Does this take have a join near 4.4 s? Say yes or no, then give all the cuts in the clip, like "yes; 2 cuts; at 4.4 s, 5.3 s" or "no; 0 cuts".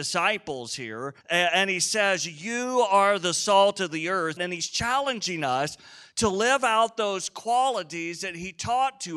yes; 2 cuts; at 1.2 s, 4.4 s